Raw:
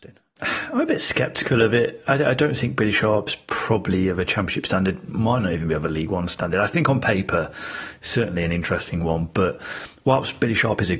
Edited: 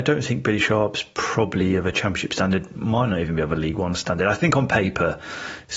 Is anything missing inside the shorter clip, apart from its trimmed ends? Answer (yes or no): no